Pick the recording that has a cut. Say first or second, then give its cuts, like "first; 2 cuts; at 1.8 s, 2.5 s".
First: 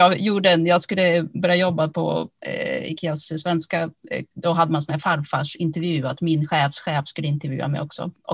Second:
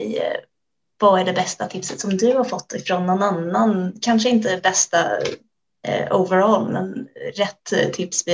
first; 1 cut; at 4.3 s